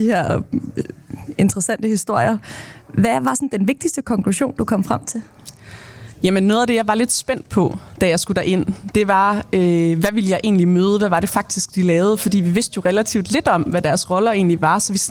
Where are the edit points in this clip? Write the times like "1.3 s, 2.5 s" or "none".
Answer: none

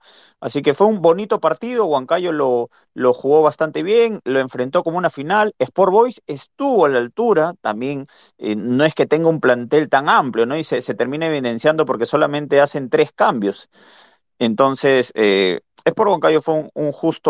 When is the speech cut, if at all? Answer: none

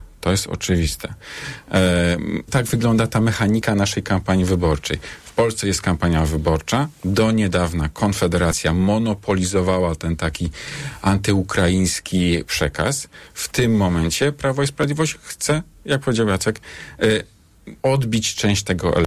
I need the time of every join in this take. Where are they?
2.5 s, 17.8 s

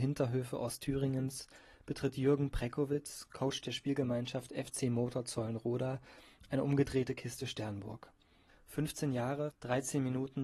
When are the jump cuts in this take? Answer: 8.5 s, 9.5 s

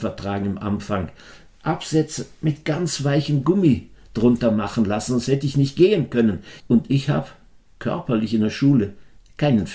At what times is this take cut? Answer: 6.6 s

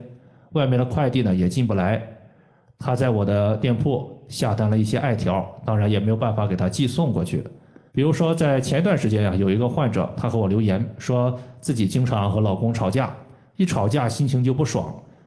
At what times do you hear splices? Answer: 7.9 s

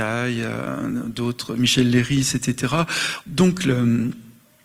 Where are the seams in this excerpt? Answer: 3.2 s

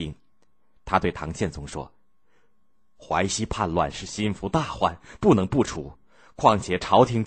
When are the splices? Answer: none

